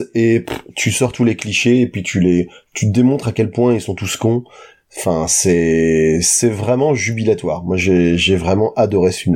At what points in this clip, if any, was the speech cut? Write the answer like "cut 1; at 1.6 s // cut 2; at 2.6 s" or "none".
none

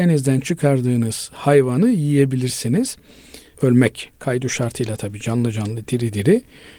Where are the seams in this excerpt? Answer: cut 1; at 3.5 s

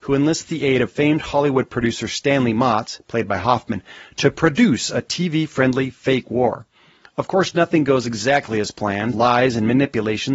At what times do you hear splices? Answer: cut 1; at 9.1 s

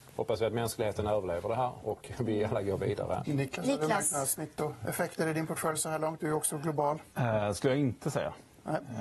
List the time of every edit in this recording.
cut 1; at 3.2 s

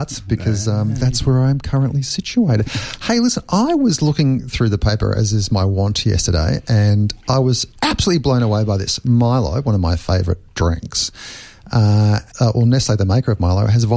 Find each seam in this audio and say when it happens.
cut 1; at 7.7 s // cut 2; at 12.3 s

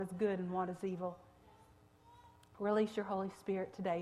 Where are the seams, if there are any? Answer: none

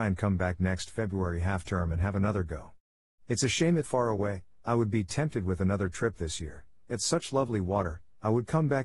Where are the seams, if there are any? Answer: cut 1; at 3.8 s

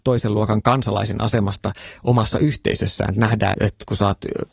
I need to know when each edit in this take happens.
cut 1; at 3.5 s

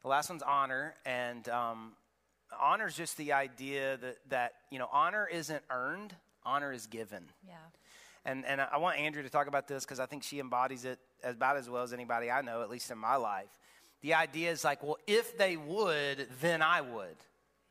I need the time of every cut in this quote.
none

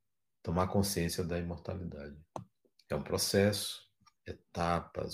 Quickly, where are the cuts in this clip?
cut 1; at 4.2 s

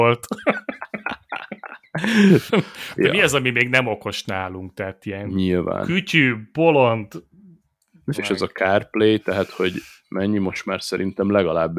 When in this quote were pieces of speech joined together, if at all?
cut 1; at 2.5 s // cut 2; at 8.1 s

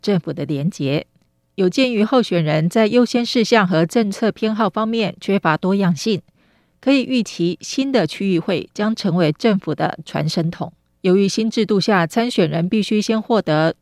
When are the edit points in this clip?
cut 1; at 11.0 s

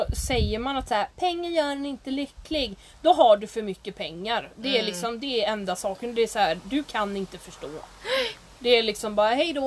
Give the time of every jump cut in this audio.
none

